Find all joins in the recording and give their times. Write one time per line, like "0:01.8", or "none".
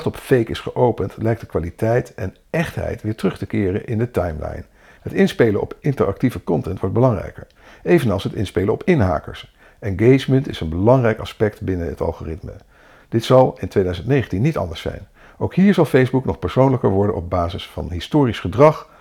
0:05.0